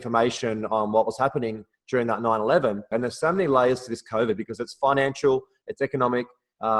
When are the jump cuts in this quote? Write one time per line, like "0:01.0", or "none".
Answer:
0:02.9

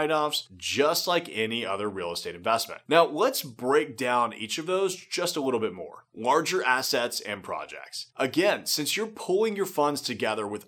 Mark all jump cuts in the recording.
none

